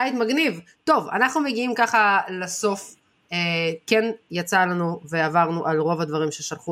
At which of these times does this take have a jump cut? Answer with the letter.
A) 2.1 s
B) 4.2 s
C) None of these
C